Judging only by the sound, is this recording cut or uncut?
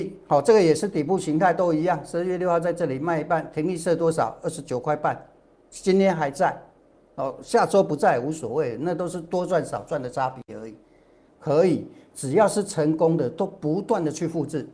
cut